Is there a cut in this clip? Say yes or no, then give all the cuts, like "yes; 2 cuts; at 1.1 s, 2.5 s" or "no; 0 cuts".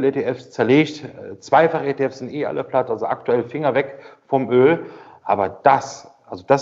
yes; 1 cut; at 5.2 s